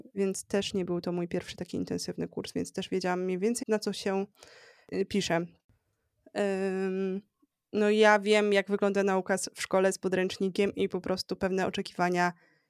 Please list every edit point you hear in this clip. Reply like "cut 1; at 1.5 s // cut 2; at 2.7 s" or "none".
cut 1; at 3.6 s